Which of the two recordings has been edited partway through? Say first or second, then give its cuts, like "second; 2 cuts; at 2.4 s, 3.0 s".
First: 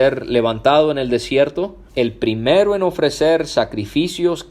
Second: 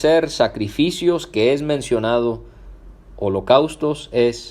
first; 1 cut; at 1.9 s